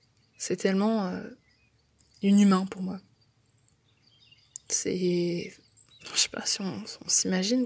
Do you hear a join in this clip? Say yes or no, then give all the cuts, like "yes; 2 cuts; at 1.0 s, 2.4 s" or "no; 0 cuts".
no; 0 cuts